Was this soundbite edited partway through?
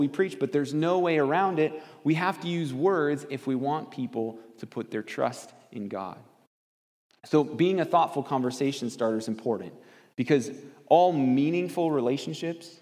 no; 0 cuts

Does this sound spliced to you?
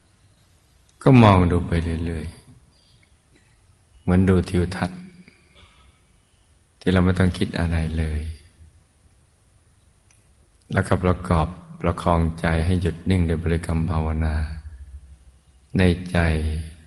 no; 0 cuts

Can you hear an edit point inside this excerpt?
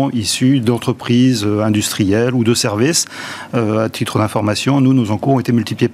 no; 0 cuts

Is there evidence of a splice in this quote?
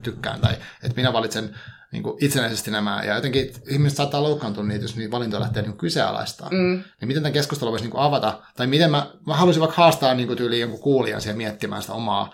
no; 0 cuts

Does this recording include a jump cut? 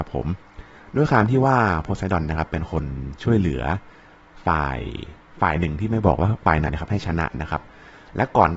yes; 1 cut; at 6.7 s

